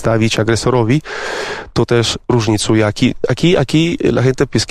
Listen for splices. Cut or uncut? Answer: uncut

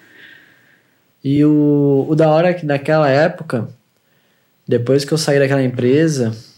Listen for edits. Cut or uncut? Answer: uncut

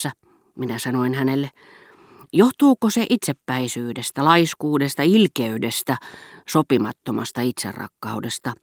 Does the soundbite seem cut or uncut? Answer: uncut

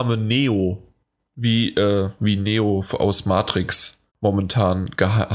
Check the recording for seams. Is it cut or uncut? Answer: cut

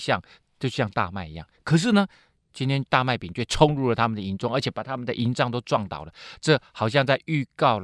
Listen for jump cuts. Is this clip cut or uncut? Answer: uncut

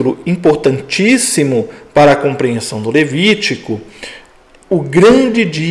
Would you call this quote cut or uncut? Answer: cut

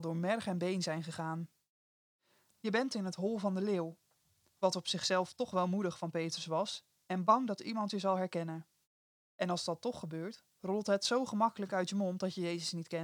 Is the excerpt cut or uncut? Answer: cut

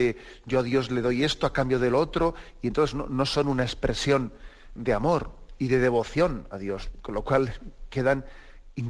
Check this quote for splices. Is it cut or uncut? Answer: cut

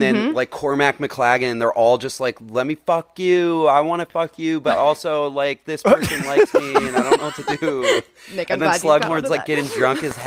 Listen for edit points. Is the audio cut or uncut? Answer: uncut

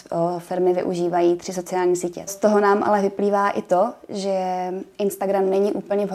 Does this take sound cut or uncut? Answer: cut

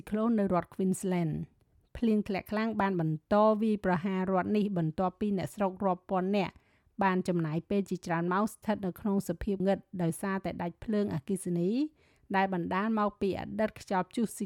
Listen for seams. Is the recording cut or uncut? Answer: cut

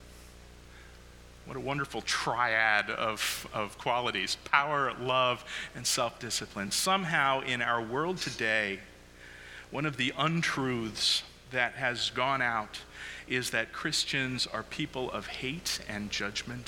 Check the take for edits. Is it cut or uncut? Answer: uncut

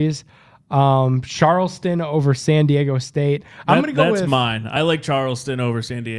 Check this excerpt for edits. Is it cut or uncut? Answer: uncut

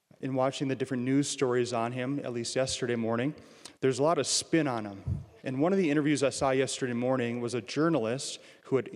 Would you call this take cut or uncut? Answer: cut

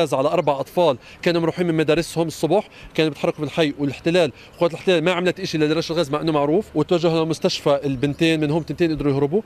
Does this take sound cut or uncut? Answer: cut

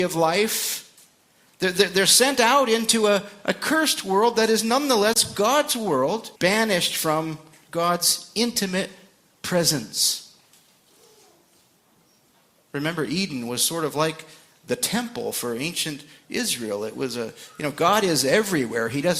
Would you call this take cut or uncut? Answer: cut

